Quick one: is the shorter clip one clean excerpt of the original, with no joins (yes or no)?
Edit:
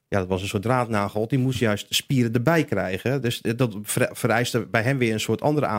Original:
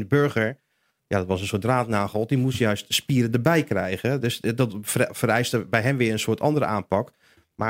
yes